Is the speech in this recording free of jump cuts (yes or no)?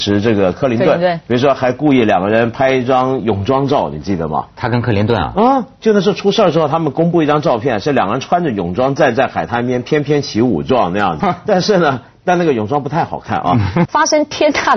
no